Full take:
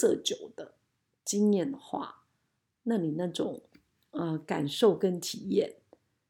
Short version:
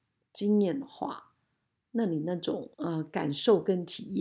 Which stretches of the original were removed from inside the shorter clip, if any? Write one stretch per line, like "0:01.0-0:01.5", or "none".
0:03.7-0:04.1